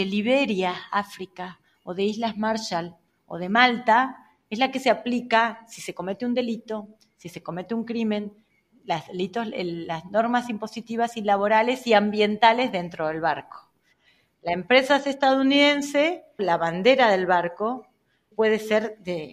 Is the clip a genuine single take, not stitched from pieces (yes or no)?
no